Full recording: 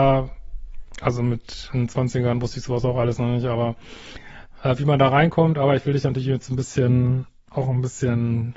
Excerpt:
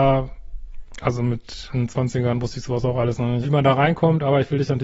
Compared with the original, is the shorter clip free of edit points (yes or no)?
no